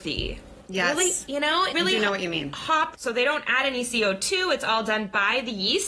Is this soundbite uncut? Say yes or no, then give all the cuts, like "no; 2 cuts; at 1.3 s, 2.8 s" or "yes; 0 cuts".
no; 2 cuts; at 1.7 s, 2.9 s